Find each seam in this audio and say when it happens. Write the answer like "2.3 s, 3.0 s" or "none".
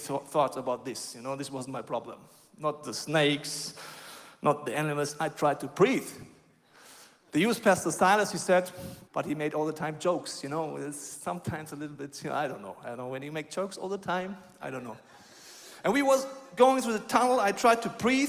9.1 s